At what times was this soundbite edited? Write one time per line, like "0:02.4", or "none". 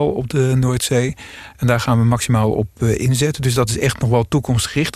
none